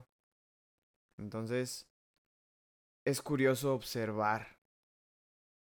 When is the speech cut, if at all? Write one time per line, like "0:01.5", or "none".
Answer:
none